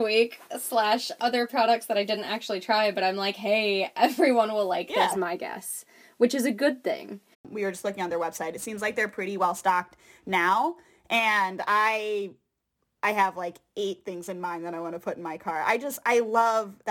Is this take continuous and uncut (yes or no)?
no